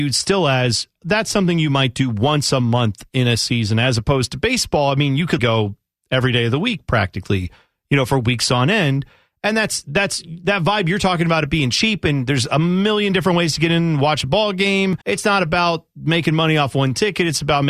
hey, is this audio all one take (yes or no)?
no